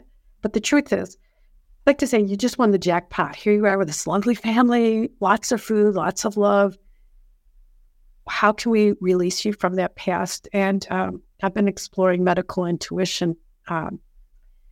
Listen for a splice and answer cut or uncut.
uncut